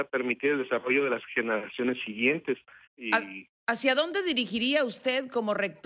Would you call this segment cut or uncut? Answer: cut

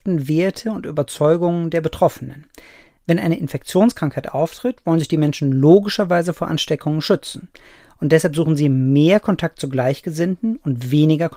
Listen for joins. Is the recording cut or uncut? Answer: uncut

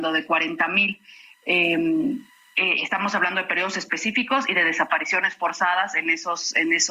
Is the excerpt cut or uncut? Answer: uncut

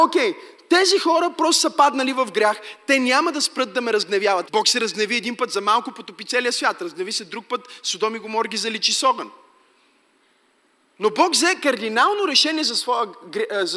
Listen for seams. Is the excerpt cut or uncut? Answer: cut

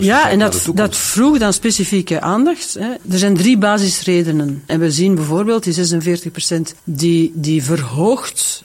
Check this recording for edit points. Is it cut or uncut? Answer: cut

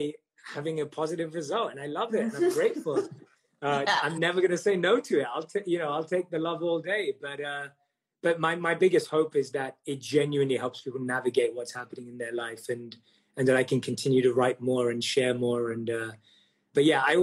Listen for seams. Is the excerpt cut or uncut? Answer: uncut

